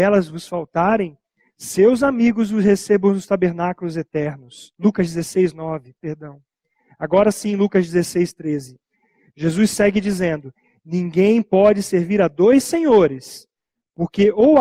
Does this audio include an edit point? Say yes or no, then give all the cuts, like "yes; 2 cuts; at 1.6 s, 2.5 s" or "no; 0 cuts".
no; 0 cuts